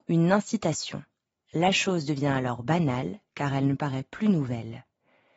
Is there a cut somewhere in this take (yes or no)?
no